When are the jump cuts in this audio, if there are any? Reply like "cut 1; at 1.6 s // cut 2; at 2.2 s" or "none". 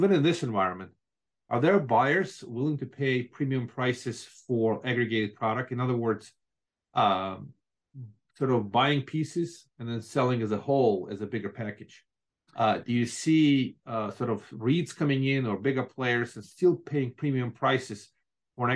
none